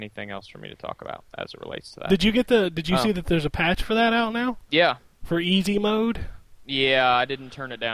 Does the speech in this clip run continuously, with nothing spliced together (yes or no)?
no